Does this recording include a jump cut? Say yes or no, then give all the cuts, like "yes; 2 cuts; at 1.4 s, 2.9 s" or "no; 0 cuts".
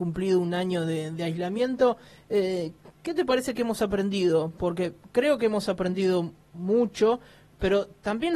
no; 0 cuts